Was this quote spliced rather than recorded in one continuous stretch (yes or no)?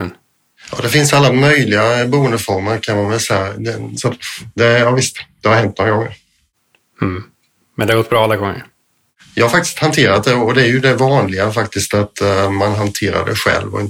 yes